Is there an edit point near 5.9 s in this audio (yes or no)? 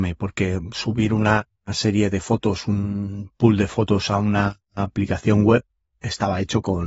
yes